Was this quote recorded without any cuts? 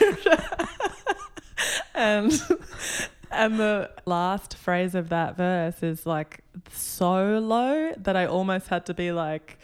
yes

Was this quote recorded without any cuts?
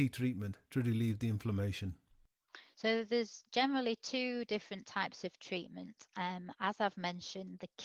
yes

